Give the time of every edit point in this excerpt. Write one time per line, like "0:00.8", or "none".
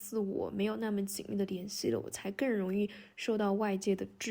none

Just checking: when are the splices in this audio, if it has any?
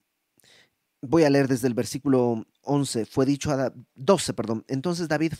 0:02.5

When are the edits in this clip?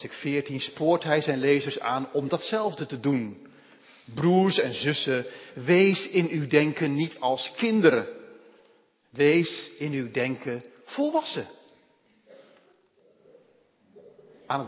none

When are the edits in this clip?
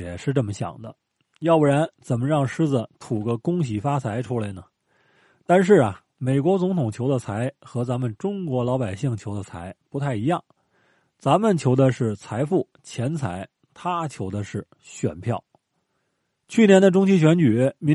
none

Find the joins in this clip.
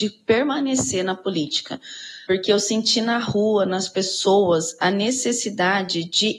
0:02.3

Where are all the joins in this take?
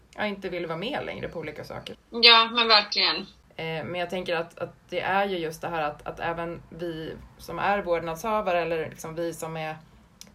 0:01.9

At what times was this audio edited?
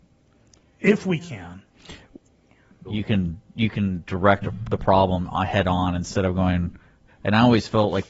0:02.8
0:07.1

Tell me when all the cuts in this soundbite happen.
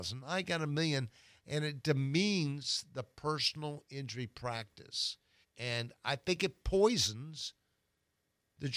0:05.4

